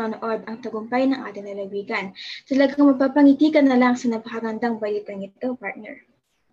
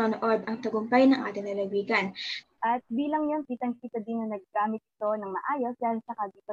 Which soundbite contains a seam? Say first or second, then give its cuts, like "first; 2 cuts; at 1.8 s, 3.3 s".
second; 2 cuts; at 2.4 s, 3.4 s